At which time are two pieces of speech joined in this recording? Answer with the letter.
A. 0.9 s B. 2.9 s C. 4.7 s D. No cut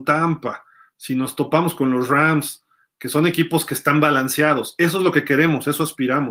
D